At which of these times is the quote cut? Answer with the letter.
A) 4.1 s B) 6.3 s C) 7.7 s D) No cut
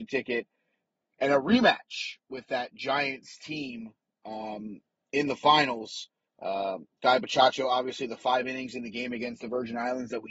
B